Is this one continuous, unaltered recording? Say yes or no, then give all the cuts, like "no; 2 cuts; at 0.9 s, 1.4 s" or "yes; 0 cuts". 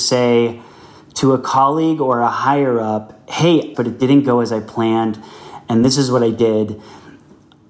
no; 1 cut; at 3.7 s